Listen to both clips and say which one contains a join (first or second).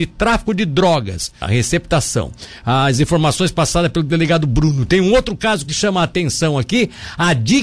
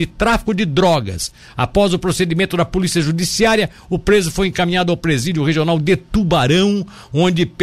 first